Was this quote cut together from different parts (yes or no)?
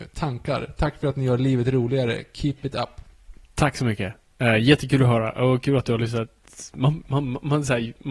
no